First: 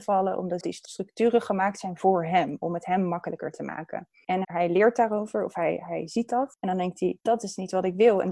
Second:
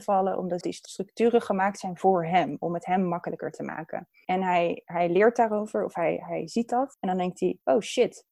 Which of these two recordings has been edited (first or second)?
first